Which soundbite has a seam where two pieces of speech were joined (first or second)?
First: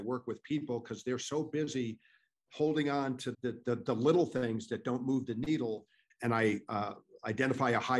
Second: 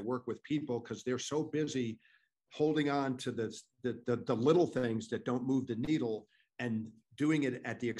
first